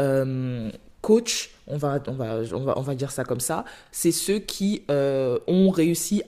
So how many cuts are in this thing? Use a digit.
0